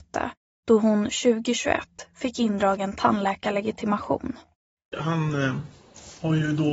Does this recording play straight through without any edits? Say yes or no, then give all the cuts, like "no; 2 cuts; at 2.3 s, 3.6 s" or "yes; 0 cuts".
no; 1 cut; at 4.9 s